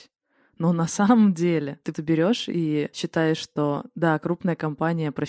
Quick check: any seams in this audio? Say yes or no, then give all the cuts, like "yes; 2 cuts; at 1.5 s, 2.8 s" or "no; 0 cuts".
yes; 1 cut; at 1.9 s